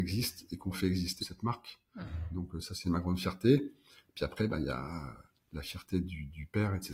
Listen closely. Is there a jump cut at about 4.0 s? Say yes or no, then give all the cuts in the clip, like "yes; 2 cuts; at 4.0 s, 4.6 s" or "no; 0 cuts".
no; 1 cut; at 1.2 s